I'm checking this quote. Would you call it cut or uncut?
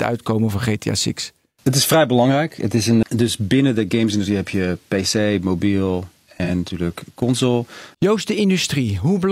cut